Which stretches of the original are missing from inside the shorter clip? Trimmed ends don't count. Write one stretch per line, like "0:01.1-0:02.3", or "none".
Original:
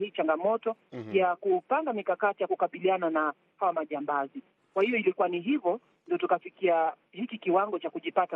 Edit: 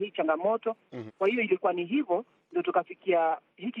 0:01.1-0:04.6